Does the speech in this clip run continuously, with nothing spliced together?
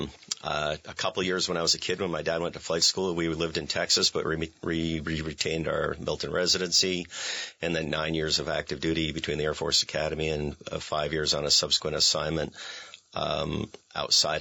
yes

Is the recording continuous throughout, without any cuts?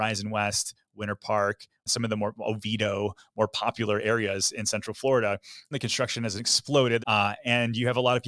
no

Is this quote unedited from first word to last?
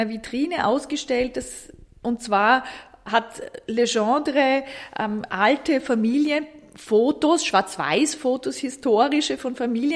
yes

